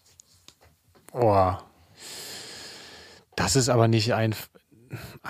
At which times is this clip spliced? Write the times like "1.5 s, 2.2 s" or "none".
none